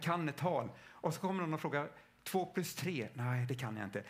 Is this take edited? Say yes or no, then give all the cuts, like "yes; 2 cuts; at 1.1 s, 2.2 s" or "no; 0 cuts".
no; 0 cuts